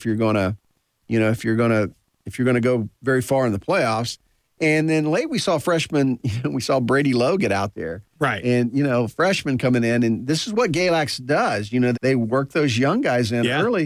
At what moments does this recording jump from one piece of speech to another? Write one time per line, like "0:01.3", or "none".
0:11.9